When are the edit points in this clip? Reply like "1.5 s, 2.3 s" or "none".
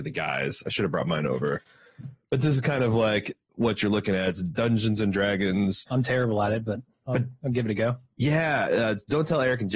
5.9 s